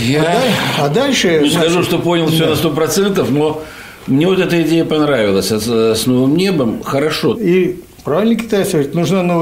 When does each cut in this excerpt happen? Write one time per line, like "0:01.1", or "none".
0:07.3